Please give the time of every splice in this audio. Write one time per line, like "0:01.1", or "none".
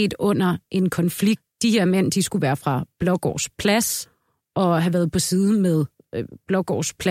none